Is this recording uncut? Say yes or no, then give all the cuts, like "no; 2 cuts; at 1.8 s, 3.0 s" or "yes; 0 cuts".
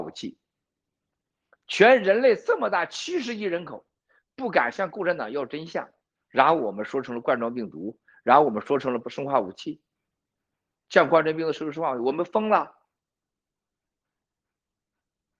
yes; 0 cuts